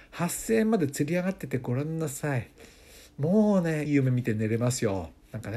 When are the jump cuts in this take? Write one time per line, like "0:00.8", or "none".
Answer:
0:03.9